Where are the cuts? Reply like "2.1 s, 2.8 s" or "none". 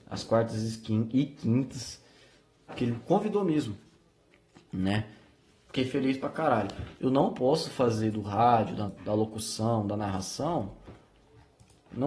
2.7 s, 6.9 s, 8.9 s